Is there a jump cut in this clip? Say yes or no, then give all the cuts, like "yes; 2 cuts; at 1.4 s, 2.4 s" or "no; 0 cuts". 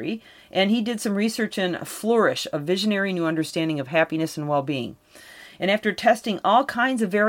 no; 0 cuts